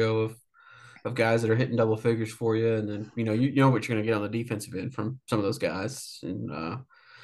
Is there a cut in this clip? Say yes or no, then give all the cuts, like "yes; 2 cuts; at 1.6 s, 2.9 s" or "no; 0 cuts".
no; 0 cuts